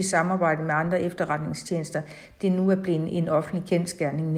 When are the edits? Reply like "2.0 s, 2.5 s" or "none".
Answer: none